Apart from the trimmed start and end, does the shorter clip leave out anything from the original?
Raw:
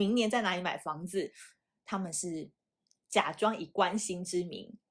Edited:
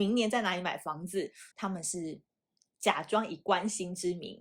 yes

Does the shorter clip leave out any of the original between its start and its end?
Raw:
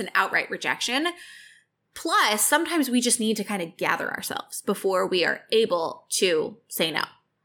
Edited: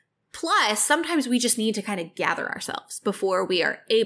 no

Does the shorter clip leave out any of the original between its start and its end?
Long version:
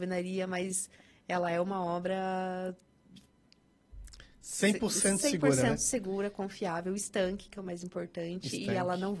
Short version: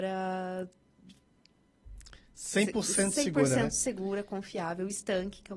no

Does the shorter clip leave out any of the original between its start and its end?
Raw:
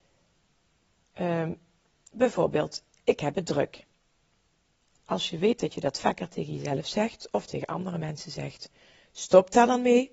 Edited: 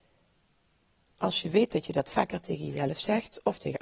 yes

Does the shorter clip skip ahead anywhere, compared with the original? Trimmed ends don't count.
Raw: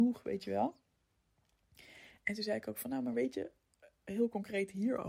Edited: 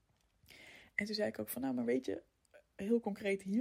no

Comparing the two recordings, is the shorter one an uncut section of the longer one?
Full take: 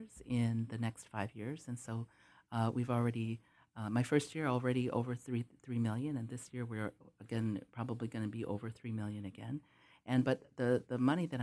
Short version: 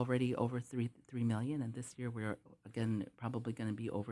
yes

